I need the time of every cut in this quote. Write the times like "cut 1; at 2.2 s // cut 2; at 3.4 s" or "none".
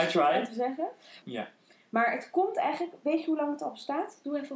cut 1; at 1.2 s